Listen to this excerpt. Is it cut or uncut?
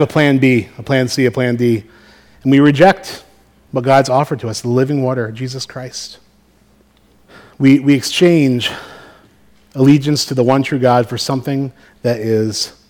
uncut